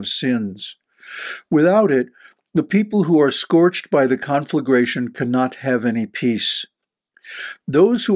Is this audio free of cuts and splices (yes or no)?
yes